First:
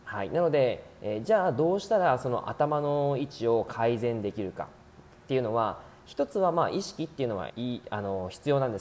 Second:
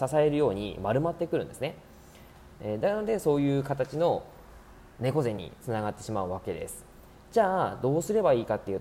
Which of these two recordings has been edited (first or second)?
first